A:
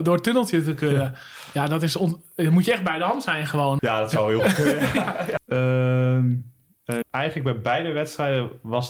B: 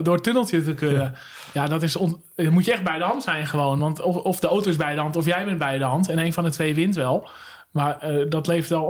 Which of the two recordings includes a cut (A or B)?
A